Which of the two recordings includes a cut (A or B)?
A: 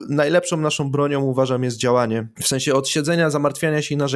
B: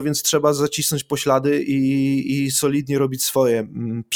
A